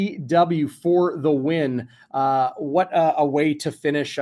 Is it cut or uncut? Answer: uncut